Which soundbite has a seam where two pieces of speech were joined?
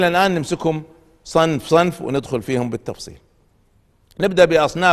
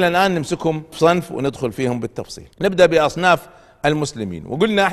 second; 2 cuts; at 0.9 s, 2.5 s

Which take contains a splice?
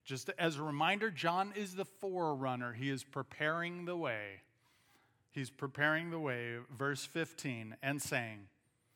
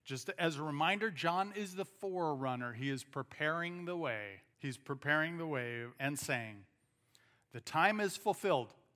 second; 2 cuts; at 4.5 s, 5.9 s

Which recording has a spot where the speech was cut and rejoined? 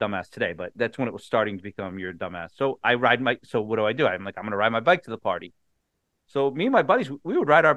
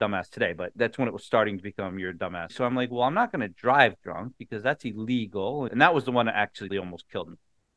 second; 3 cuts; at 2.5 s, 5.7 s, 6.7 s

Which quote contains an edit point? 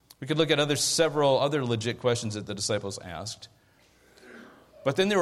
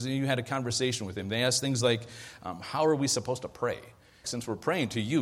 second; 1 cut; at 4.2 s

